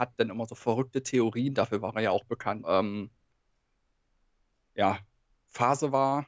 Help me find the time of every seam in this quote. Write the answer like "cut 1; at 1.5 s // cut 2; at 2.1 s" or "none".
cut 1; at 2.6 s